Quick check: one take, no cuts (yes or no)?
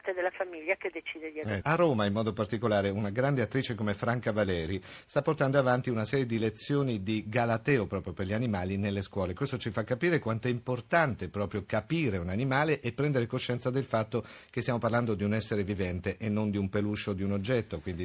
no